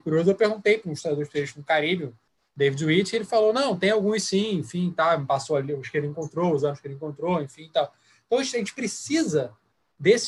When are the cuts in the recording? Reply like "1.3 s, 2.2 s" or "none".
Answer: none